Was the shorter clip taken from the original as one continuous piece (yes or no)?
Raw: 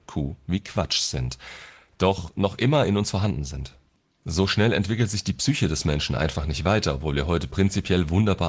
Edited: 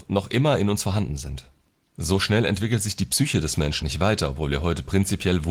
no